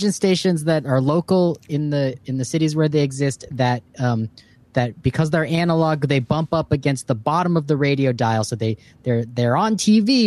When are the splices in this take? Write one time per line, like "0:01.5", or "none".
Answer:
none